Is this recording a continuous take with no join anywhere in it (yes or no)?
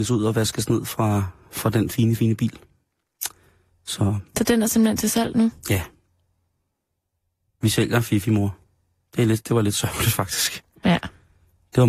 no